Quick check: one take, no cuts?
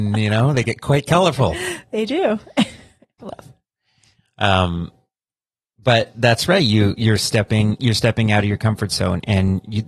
no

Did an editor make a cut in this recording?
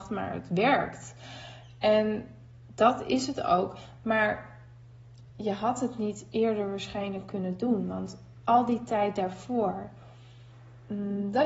no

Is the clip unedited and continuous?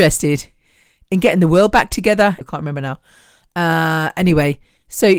no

